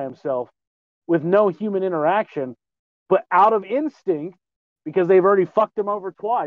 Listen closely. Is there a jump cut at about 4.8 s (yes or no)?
no